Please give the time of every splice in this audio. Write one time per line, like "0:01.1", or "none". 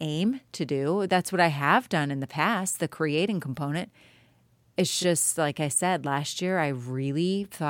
none